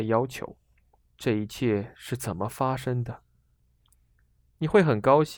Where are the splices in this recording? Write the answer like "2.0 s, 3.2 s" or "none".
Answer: 1.1 s